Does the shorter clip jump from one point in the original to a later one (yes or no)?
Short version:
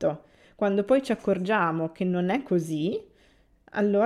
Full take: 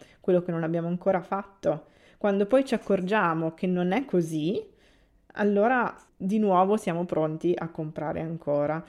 no